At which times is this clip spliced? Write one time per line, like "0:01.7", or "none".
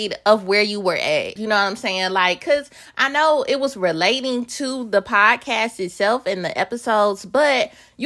0:01.4

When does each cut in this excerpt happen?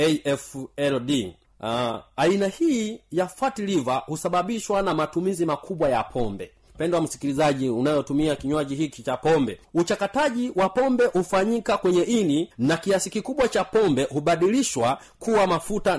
none

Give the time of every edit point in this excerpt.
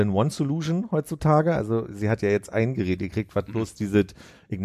none

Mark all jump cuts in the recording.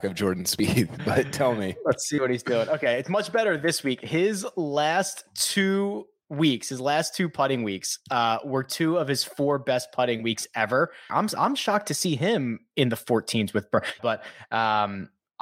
0:11.1
0:14.0

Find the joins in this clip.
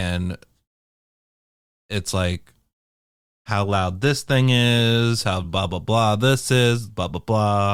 none

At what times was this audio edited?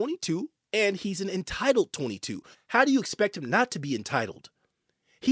0:02.5

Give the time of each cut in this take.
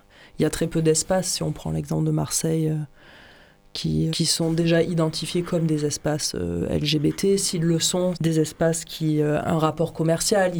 0:04.1
0:08.1
0:09.4

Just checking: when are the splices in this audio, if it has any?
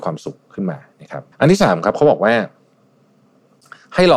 0:01.3

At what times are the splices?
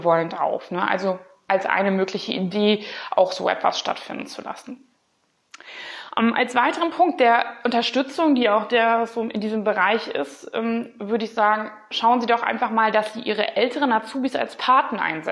none

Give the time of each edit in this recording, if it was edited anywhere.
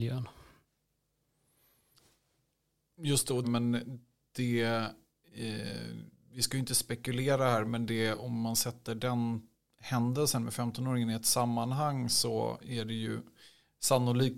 0:03.4

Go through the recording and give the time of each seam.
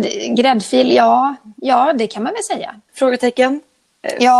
0:02.9

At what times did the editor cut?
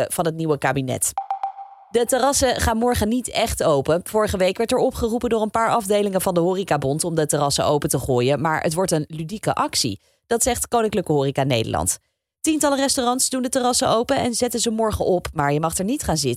none

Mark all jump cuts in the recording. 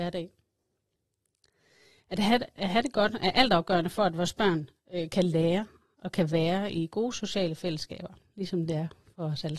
none

